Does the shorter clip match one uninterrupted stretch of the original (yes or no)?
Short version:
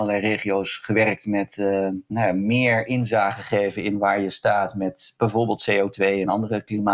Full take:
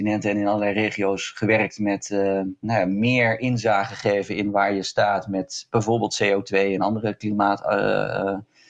yes